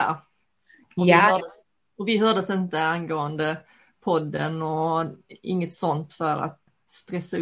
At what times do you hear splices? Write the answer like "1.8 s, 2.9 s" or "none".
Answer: none

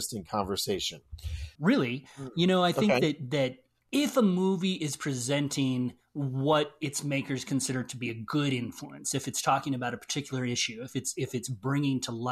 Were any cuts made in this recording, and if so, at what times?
1.6 s

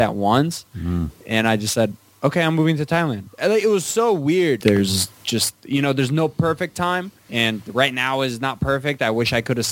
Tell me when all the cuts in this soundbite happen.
4.6 s, 7.2 s

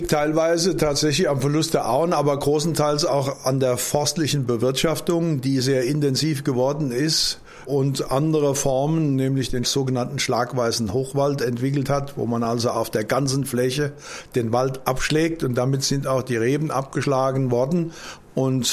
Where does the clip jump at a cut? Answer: none

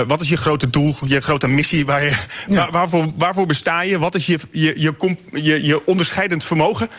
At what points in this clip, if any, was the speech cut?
none

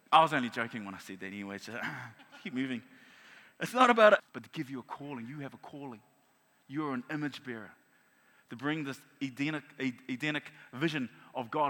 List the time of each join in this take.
4.2 s

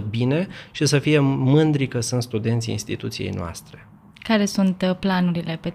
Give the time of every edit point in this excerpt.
none

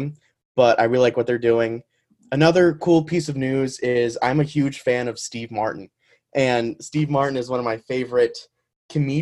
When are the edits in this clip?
none

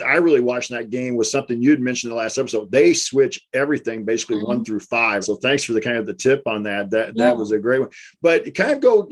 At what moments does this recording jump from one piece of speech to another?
5.2 s

